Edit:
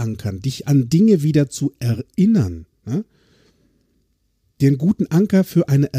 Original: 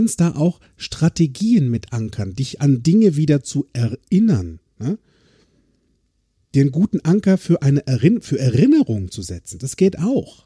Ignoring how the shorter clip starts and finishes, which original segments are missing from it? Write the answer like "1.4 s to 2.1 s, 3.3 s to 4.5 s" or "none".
none

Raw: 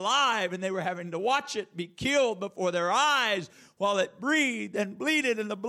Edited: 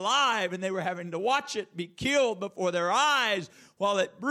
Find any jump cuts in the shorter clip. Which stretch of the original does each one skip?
none

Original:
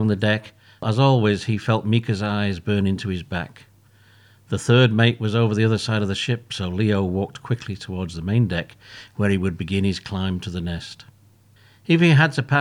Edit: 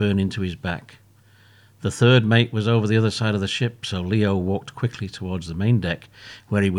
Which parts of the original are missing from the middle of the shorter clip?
none

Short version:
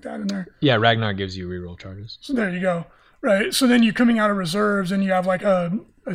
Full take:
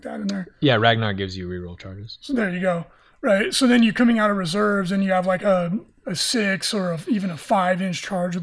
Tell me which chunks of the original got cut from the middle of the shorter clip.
none

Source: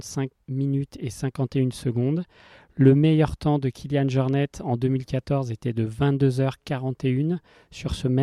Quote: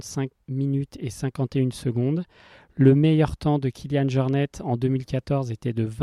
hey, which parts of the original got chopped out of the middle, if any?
none

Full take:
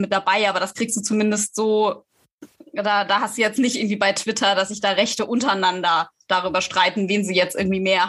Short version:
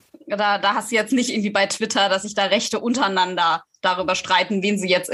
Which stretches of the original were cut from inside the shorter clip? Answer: none

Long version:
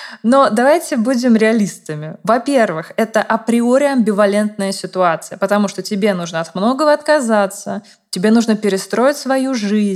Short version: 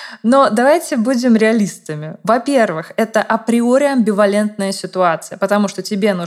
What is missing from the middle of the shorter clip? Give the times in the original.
none

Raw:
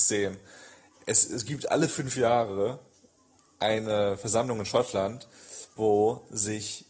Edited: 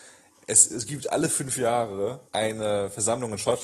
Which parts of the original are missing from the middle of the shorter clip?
2.9 s to 3.5 s

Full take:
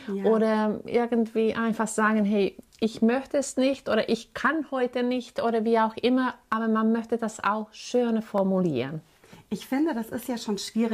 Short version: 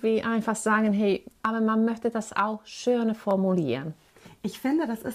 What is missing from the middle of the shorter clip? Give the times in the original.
2.7 s to 6.5 s

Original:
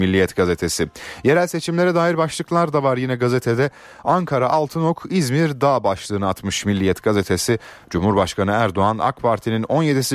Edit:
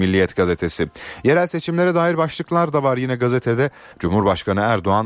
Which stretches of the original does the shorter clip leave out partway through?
3.9 s to 7.8 s

